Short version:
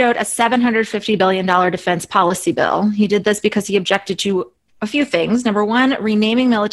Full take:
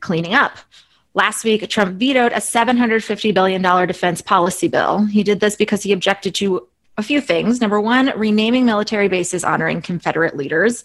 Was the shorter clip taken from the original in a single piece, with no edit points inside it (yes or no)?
yes